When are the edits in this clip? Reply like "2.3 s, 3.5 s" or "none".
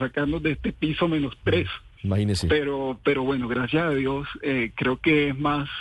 none